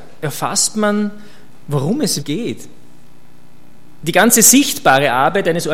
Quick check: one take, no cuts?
no; 2 cuts; at 2.2 s, 4.0 s

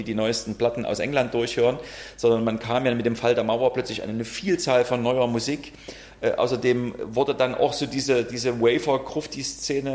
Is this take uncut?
yes; 0 cuts

